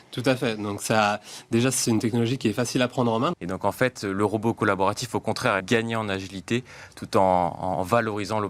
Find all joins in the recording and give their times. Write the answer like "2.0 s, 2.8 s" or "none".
3.3 s, 5.6 s